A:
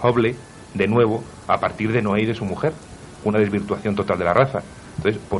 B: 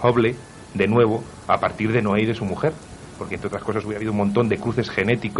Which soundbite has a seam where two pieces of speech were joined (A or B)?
A